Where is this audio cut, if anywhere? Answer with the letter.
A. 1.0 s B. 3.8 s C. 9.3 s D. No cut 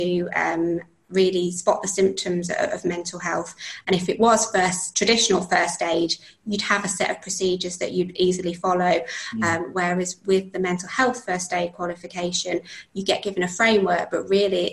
D